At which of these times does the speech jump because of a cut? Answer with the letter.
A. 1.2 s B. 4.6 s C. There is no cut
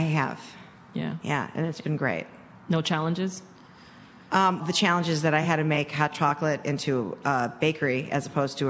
B